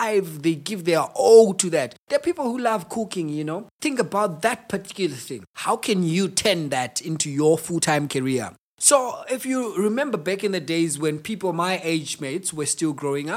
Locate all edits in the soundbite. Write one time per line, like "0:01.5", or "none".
none